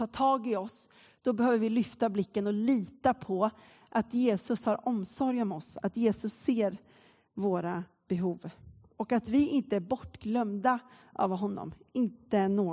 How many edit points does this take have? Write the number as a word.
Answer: zero